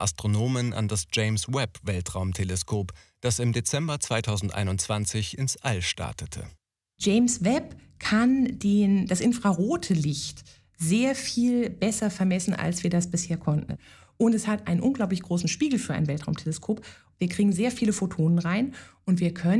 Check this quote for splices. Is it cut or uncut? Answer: uncut